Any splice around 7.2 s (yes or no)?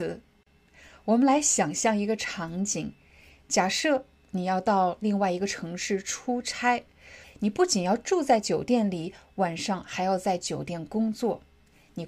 yes